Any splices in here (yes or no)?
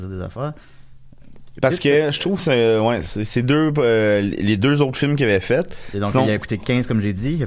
no